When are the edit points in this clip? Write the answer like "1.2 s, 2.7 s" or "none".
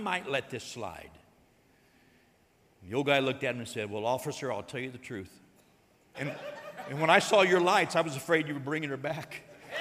6.1 s